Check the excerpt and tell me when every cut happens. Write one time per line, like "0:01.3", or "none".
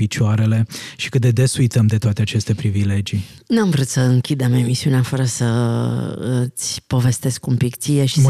none